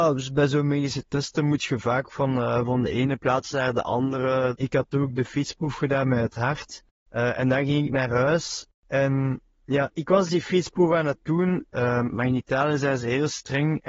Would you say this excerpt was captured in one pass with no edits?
no; 2 cuts; at 4.5 s, 11.7 s

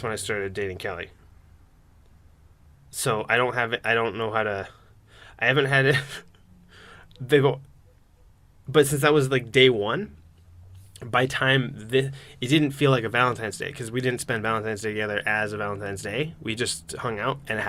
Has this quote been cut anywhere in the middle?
no; 0 cuts

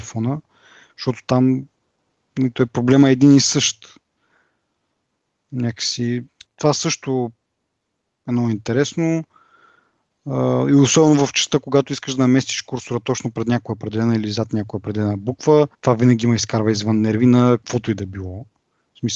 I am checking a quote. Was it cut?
yes; 2 cuts; at 6.4 s, 15.7 s

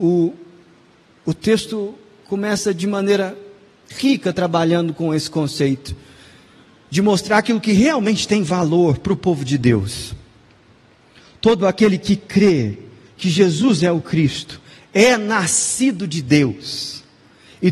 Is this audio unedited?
yes; 0 cuts

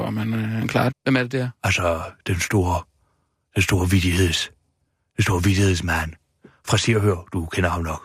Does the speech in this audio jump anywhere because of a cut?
yes; 1 cut; at 0.9 s

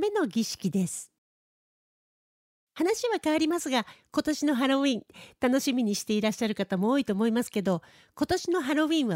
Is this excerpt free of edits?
yes; 0 cuts

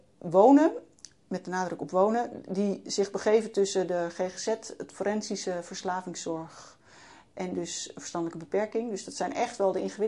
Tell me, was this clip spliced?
no; 0 cuts

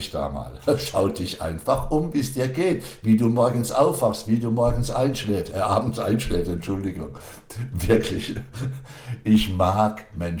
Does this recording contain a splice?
no; 0 cuts

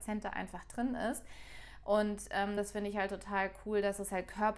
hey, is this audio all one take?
yes; 0 cuts

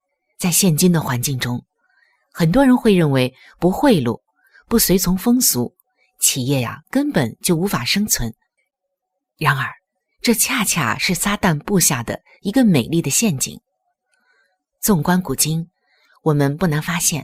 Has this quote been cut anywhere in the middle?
no; 0 cuts

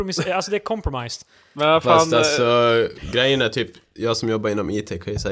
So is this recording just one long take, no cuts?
yes; 0 cuts

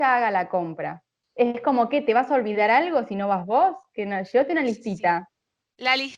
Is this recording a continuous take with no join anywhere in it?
yes; 0 cuts

